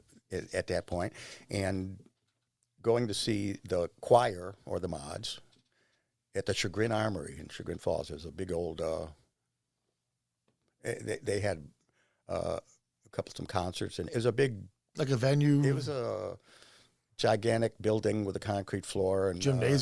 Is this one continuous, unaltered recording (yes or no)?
yes